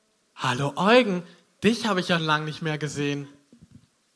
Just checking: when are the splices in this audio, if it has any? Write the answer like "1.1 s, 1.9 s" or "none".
2.2 s